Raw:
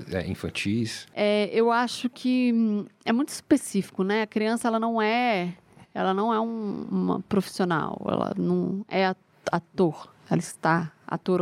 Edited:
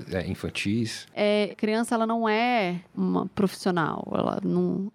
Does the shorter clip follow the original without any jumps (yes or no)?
no